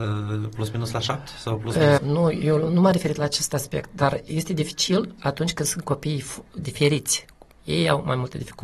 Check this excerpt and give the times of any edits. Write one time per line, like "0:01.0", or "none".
0:02.0
0:07.5